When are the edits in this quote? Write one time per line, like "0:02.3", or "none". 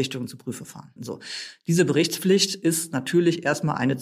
0:01.0